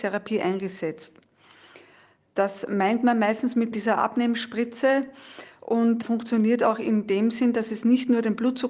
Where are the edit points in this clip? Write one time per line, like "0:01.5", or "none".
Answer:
0:03.7